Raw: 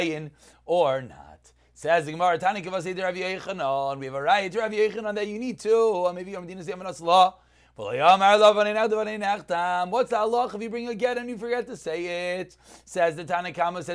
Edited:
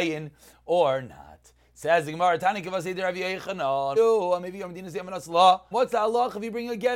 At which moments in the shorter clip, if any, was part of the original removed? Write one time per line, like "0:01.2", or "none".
0:04.0
0:05.7